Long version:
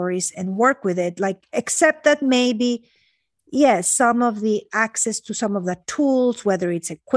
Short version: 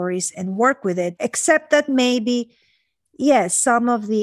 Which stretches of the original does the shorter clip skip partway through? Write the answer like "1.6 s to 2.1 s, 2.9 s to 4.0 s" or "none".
1.2 s to 1.5 s